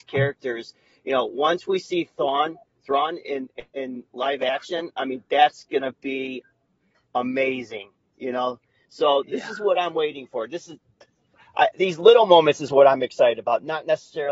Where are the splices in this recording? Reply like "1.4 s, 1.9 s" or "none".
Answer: none